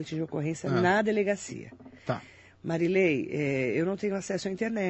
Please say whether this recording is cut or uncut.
uncut